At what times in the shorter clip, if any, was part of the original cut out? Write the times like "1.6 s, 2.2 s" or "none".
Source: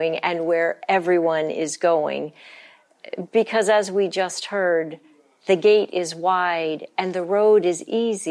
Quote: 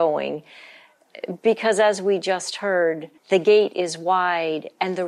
3.2 s